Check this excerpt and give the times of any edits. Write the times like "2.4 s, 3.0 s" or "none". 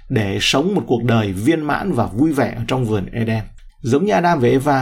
3.7 s